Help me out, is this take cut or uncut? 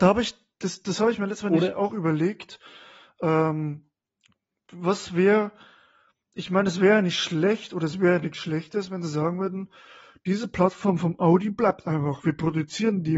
uncut